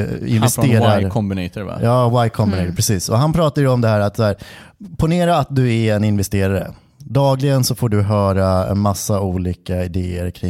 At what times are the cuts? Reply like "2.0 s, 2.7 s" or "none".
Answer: none